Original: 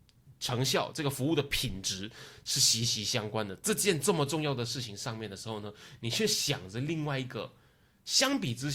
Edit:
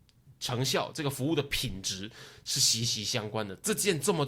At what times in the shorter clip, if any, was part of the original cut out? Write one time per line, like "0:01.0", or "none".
none

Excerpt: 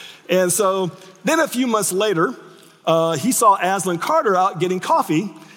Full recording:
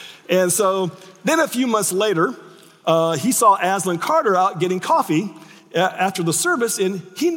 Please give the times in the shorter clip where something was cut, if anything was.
none

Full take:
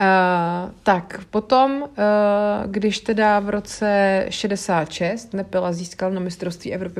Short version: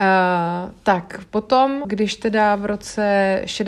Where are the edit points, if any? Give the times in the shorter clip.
0:01.8

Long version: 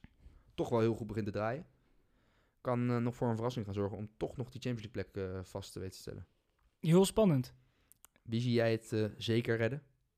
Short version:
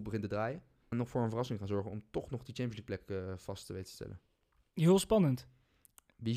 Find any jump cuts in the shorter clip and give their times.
0:00.9

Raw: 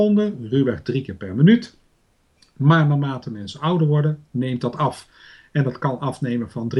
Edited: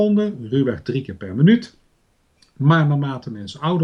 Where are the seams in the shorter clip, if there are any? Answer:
none

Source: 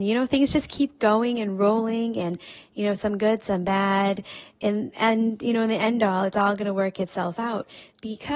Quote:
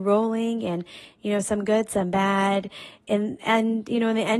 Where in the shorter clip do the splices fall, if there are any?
none

